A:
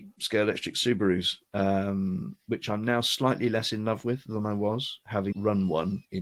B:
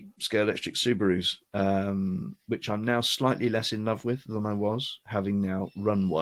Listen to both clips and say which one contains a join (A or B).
A